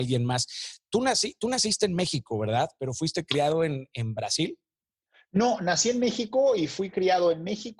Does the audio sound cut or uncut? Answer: uncut